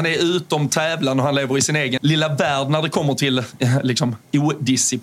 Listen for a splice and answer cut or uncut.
cut